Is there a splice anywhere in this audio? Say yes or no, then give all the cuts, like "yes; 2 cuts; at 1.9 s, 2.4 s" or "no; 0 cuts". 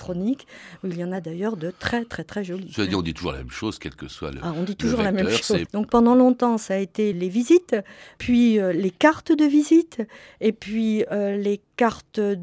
yes; 2 cuts; at 5.7 s, 7.1 s